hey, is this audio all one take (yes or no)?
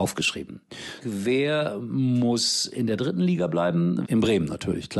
no